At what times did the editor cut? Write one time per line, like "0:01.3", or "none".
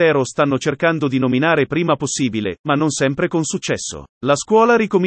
0:04.1